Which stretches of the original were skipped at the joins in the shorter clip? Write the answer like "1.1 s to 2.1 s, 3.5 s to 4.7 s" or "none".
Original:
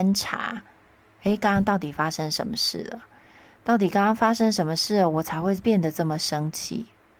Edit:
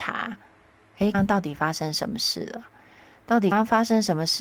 1.4 s to 1.5 s, 3.9 s to 4.0 s